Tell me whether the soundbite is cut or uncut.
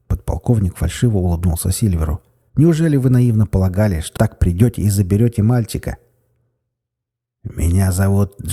cut